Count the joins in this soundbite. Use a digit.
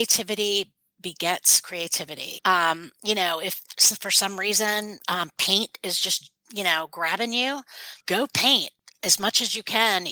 2